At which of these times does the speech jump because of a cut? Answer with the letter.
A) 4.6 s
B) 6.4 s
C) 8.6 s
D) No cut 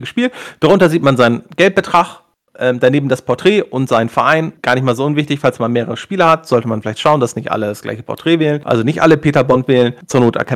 D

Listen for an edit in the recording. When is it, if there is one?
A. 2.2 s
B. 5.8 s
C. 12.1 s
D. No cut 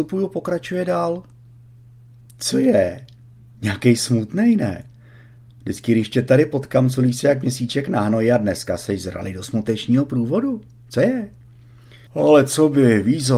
C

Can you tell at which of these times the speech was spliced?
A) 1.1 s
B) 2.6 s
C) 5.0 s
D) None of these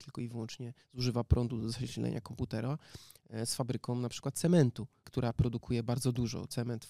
C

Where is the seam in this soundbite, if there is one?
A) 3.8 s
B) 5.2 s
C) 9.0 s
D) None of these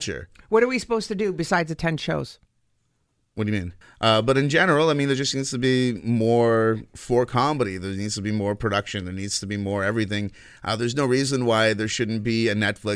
A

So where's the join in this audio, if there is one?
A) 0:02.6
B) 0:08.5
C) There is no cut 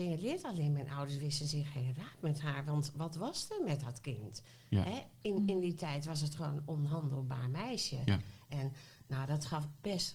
B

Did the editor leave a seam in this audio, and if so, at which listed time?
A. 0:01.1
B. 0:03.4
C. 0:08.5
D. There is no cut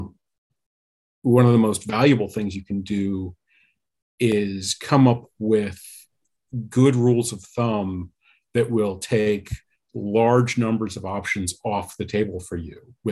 D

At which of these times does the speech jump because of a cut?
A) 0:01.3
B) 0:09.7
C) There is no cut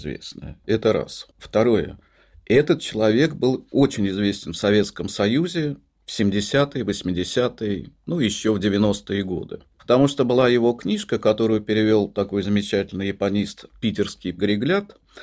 A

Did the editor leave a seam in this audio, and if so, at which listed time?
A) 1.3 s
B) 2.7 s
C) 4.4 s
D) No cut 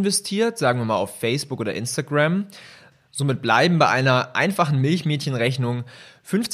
D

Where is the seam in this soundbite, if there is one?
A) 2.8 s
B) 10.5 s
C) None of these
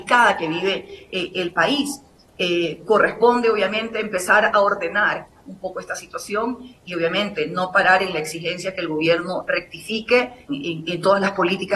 B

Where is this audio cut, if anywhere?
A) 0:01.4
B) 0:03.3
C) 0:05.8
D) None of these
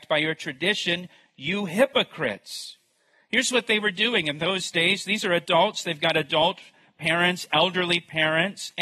D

